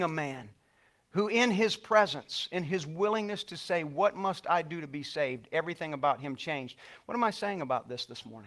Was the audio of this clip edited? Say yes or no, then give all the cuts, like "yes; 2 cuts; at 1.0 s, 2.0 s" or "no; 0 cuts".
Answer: no; 0 cuts